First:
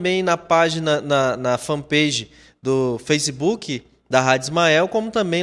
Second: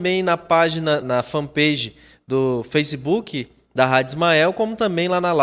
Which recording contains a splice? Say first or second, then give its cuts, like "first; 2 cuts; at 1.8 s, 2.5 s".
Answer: second; 1 cut; at 1.0 s